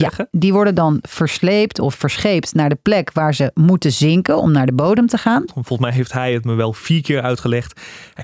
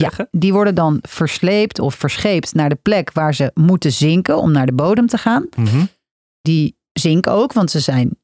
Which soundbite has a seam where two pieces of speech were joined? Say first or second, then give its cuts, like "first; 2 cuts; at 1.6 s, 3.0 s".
first; 1 cut; at 5.5 s